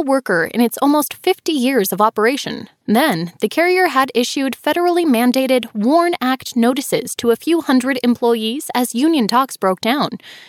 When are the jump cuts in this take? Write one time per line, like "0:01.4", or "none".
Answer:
0:02.8